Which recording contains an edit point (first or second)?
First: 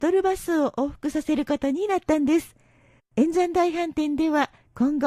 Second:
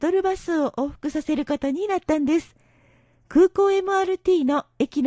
first